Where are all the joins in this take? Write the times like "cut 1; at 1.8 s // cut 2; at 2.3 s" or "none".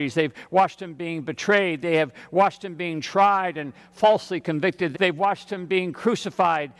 cut 1; at 4.9 s